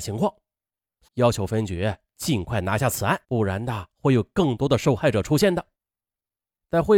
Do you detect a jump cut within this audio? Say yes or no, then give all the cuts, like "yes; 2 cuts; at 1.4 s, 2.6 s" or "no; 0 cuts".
yes; 2 cuts; at 1.1 s, 3.2 s